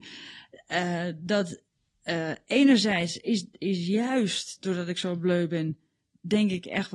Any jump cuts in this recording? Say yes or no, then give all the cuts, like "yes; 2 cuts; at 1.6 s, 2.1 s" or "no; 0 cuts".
no; 0 cuts